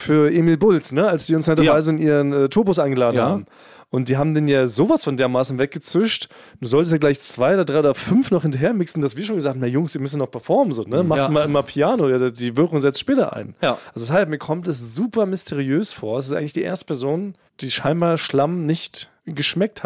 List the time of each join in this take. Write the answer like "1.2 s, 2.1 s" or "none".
none